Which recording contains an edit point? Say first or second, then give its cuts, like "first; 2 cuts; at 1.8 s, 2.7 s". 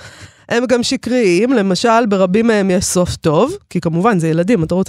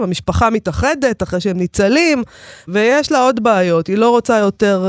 second; 1 cut; at 2.7 s